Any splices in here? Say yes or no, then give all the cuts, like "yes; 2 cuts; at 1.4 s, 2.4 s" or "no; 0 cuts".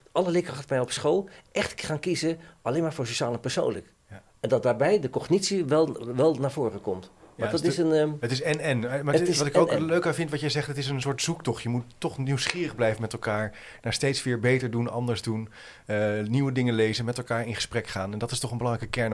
yes; 1 cut; at 4.0 s